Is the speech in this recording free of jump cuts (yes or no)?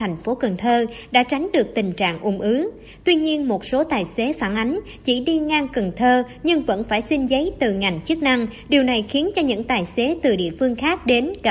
yes